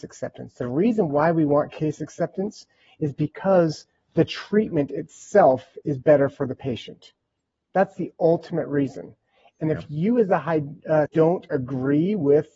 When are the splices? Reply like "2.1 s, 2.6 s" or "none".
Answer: 11.0 s

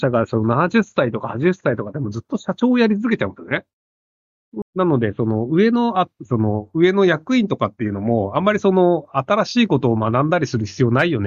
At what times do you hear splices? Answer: 4.6 s, 6.3 s

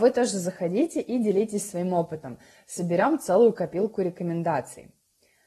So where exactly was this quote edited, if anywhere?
none

